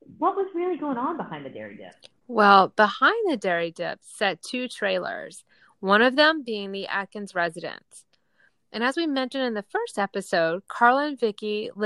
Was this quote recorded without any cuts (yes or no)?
yes